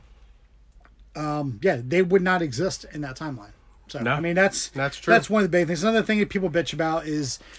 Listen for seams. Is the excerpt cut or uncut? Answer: uncut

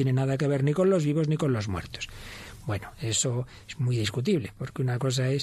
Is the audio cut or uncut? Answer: uncut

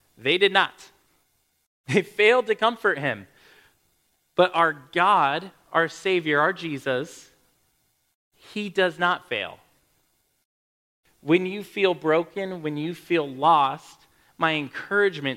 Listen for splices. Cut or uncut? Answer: uncut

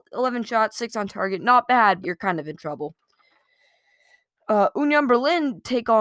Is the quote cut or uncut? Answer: cut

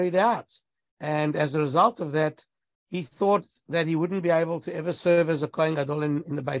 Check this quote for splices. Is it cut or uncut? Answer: uncut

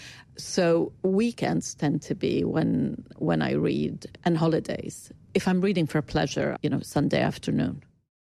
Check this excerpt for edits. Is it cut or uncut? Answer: cut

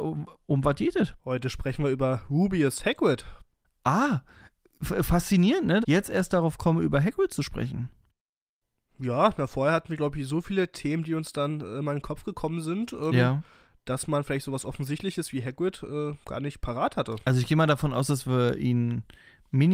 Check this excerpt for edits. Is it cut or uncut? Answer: cut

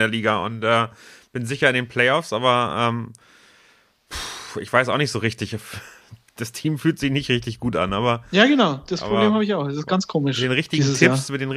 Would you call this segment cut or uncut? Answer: uncut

